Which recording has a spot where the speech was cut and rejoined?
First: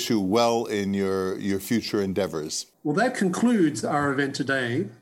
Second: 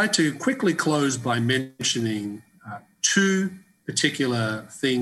first; 1 cut; at 2.7 s

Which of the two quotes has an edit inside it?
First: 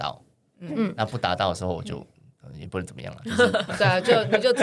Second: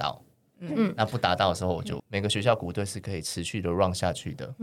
second; 1 cut; at 2.0 s

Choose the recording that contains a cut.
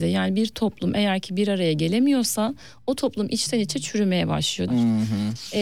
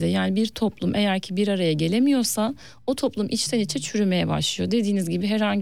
first; 1 cut; at 4.7 s

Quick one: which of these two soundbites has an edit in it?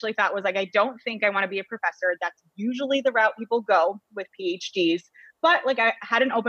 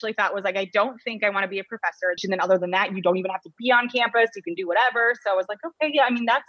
second; 1 cut; at 2.2 s

